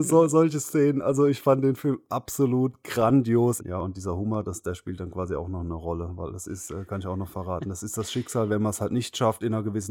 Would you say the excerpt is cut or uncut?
cut